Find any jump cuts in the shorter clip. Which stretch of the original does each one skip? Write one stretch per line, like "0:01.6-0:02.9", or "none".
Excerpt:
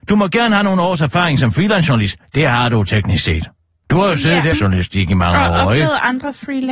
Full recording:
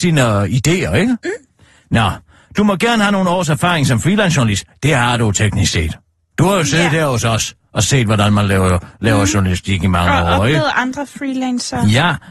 0:07.0-0:09.3